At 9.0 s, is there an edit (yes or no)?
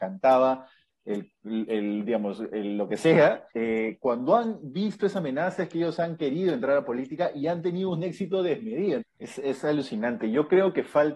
yes